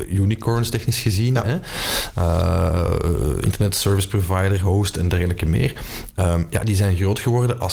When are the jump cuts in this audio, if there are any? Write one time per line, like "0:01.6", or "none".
none